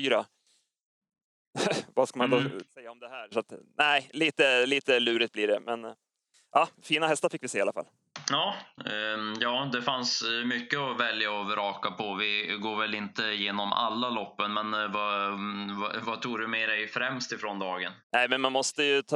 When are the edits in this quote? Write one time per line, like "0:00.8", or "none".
0:18.0

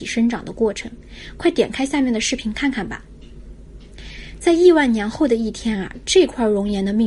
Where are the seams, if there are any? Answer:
none

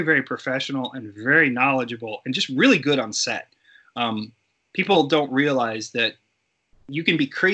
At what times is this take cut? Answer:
none

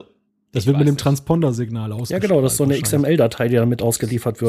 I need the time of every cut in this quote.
none

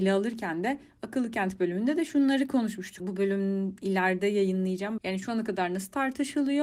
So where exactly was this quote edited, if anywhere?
0:03.0
0:05.0

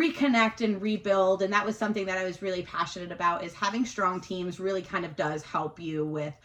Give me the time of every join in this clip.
none

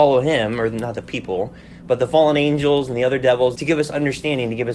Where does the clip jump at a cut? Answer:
0:03.6

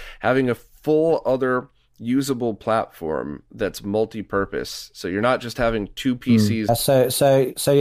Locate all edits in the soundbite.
0:06.7

